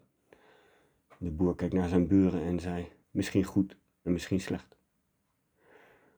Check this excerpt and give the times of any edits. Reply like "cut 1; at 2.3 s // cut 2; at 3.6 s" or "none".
cut 1; at 3.0 s